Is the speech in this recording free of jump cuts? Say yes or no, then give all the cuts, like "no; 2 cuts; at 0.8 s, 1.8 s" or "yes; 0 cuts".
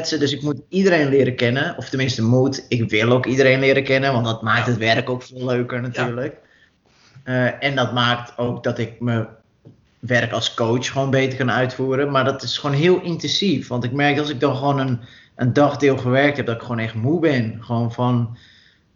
yes; 0 cuts